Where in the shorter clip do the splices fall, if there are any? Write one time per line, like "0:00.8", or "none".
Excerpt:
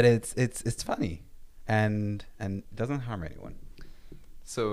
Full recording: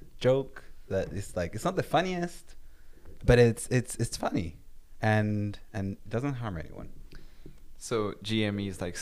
none